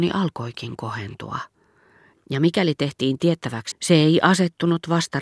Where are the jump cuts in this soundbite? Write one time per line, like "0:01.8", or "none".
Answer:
0:02.1
0:03.7